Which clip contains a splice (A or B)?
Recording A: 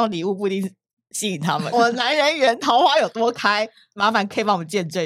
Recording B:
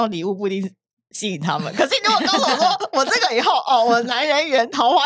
A